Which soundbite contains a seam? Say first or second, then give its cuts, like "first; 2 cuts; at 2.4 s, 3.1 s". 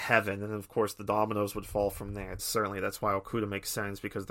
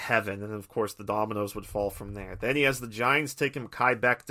first; 1 cut; at 2.4 s